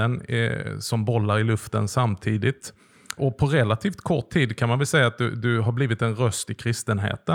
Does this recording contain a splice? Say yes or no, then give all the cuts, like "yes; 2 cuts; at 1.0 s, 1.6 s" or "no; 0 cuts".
yes; 1 cut; at 3.2 s